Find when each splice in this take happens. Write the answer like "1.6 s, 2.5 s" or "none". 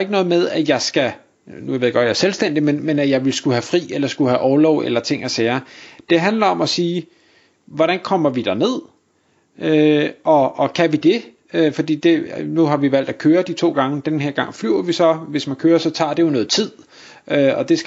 none